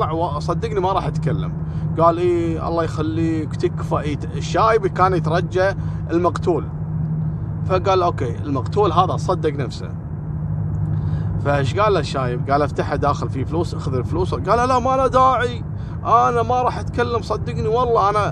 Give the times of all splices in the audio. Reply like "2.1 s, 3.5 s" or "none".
12.5 s